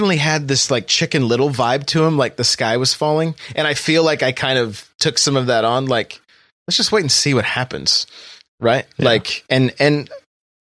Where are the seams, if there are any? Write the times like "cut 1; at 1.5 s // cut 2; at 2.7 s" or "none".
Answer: none